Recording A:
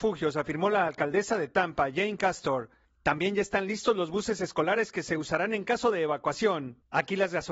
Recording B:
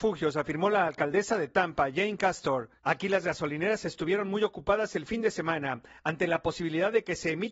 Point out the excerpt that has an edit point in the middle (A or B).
B